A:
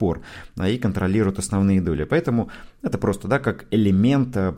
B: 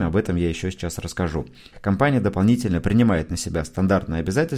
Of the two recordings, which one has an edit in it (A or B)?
B